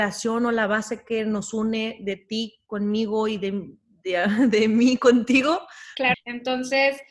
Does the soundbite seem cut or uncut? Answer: cut